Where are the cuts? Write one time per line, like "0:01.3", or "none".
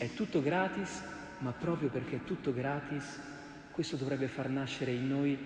none